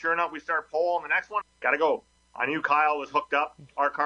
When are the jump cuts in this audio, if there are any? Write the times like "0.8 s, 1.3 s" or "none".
1.4 s